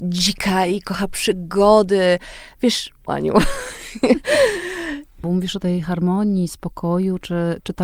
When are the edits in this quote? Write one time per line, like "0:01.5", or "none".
0:03.1
0:05.2